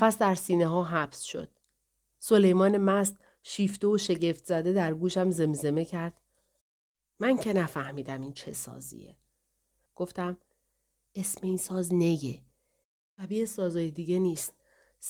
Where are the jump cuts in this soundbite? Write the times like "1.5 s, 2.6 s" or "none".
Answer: 9.9 s